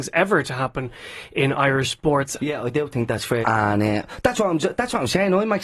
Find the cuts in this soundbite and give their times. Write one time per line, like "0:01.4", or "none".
0:02.4
0:03.4